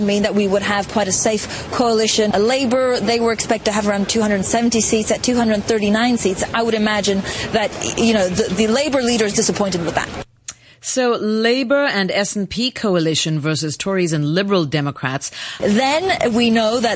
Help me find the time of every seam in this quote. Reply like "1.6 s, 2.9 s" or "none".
15.6 s